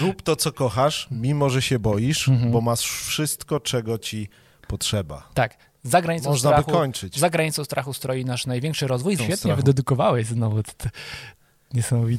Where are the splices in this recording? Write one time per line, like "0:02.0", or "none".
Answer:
0:09.2